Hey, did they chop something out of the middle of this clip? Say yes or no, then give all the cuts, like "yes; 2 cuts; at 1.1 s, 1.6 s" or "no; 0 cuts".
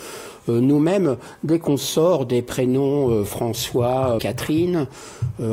yes; 1 cut; at 4.2 s